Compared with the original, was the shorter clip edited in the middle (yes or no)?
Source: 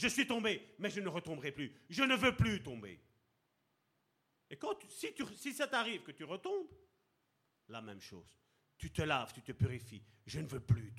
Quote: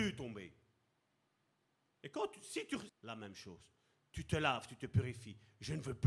yes